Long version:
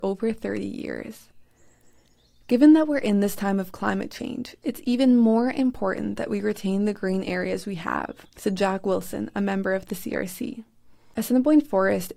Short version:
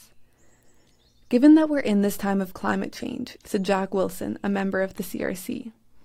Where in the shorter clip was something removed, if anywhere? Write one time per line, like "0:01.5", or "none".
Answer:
0:03.4